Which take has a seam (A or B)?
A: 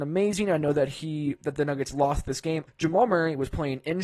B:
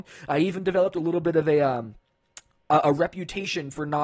A